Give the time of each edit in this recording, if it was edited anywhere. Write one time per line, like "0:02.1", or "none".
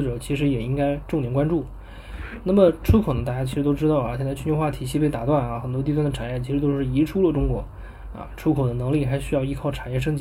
none

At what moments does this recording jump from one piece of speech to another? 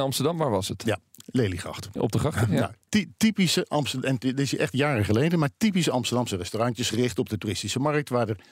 0:02.0

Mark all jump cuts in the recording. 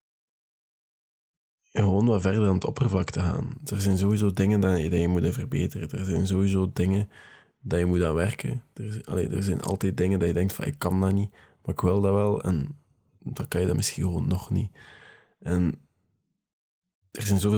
none

